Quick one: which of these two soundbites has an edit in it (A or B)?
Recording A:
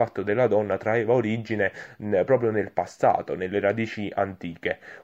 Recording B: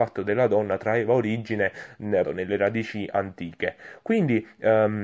B